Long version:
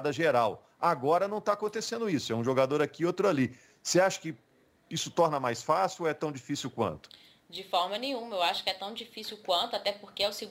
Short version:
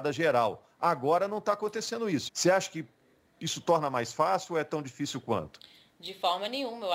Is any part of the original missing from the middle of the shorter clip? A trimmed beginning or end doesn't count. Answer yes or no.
yes